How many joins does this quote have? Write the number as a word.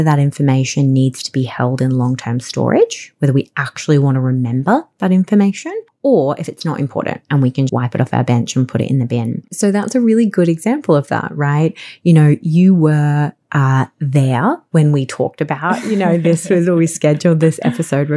two